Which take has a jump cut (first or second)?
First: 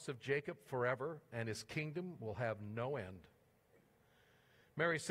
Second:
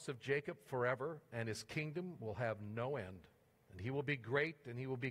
second